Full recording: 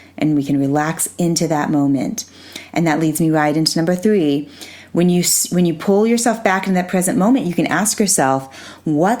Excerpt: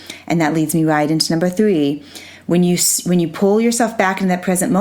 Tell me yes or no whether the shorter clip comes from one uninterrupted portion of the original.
yes